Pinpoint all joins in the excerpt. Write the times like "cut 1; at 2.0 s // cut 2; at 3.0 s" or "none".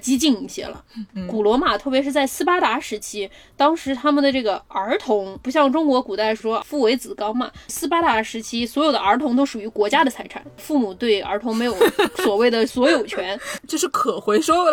cut 1; at 13.6 s

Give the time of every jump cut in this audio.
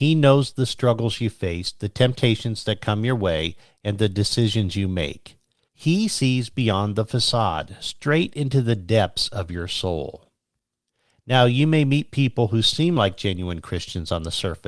none

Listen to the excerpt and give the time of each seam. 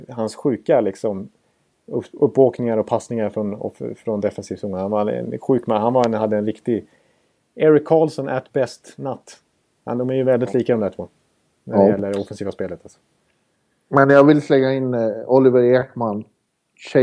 none

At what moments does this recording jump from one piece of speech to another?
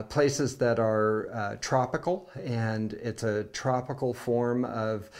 none

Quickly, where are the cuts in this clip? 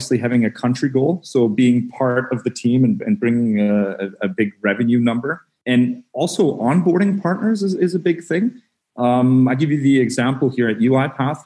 none

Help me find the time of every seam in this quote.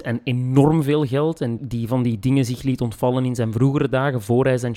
none

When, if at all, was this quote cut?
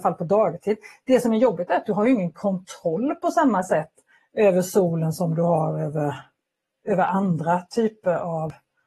none

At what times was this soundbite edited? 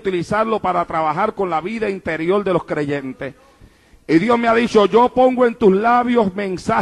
none

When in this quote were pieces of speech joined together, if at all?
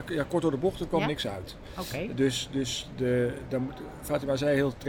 none

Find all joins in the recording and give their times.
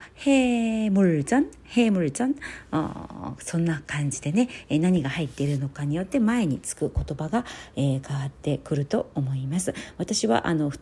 none

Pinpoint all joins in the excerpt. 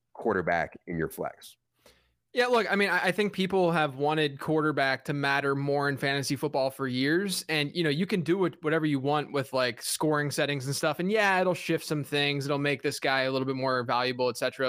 none

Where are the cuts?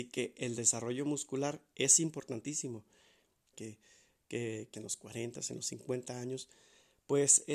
cut 1; at 3.5 s // cut 2; at 4.7 s

